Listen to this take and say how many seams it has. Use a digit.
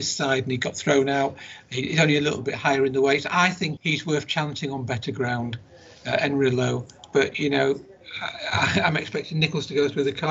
1